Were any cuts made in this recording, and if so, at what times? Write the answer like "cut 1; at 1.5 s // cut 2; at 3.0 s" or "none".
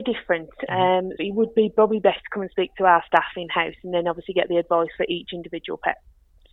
cut 1; at 1.2 s